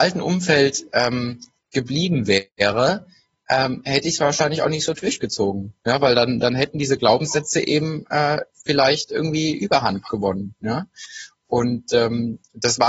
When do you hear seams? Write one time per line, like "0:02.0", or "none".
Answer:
none